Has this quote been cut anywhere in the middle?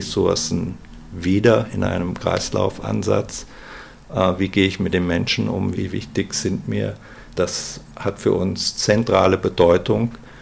yes; 2 cuts; at 5.7 s, 7.3 s

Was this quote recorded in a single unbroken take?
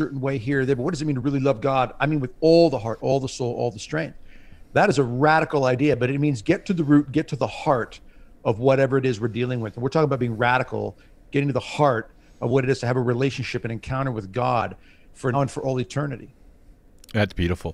no; 2 cuts; at 3.0 s, 15.3 s

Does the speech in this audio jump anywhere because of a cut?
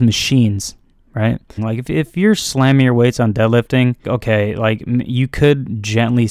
yes; 2 cuts; at 1.6 s, 4.0 s

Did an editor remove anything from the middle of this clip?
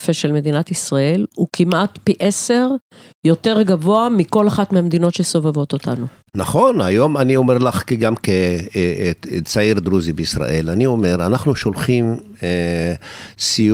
no; 0 cuts

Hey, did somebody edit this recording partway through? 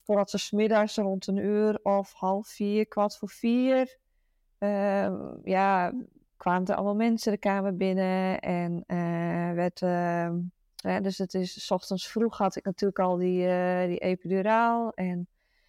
yes; 1 cut; at 10.8 s

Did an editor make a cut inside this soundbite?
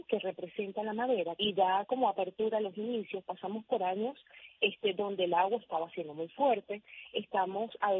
yes; 1 cut; at 1.4 s

